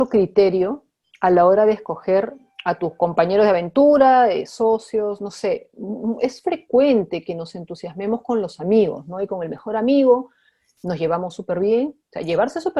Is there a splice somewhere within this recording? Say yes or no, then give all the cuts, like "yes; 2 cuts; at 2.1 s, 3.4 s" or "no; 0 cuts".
no; 0 cuts